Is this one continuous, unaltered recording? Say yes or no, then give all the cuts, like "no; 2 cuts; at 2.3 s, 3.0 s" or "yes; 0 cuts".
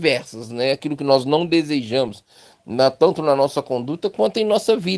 yes; 0 cuts